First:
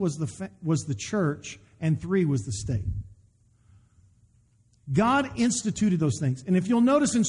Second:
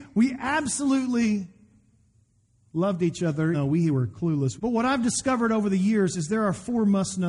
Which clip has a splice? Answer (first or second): second